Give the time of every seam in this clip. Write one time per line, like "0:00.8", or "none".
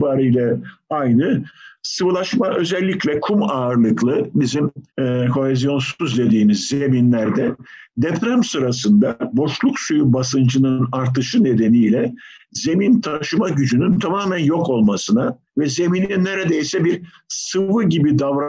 0:01.8
0:04.9
0:15.5